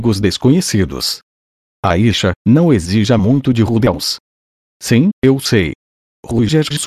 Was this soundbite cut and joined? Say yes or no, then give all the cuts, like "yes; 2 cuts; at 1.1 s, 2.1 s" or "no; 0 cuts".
no; 0 cuts